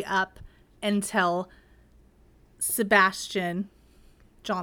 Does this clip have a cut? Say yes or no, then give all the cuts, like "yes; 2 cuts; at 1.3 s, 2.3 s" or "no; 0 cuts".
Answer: no; 0 cuts